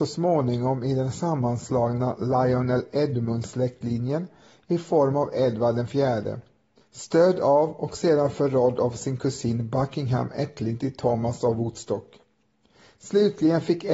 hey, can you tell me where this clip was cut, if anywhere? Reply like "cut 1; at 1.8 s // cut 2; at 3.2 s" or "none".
cut 1; at 6.8 s